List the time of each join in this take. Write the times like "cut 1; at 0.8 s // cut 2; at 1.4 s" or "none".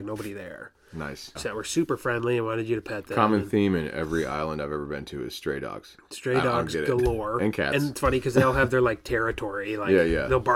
cut 1; at 1.4 s